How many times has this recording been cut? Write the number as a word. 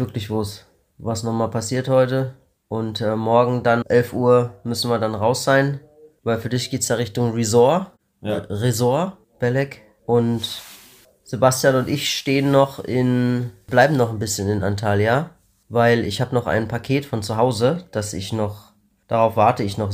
two